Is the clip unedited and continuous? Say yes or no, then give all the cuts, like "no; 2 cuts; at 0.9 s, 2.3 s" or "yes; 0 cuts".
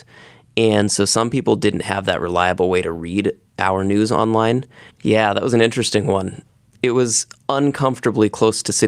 no; 1 cut; at 4.9 s